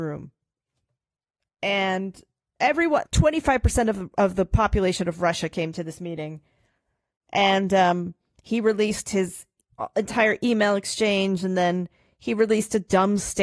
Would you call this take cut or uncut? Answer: cut